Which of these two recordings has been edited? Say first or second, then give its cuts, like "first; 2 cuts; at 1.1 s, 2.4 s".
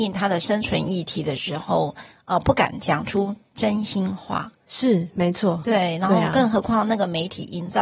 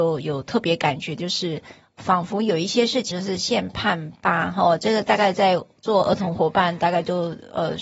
second; 1 cut; at 3.1 s